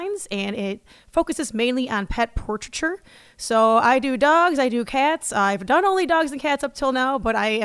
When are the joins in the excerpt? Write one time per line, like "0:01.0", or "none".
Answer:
none